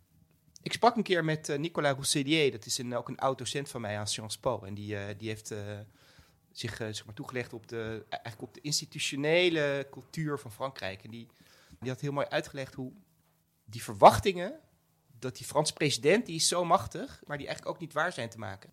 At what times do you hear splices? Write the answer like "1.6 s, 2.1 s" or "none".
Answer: 11.8 s, 17.3 s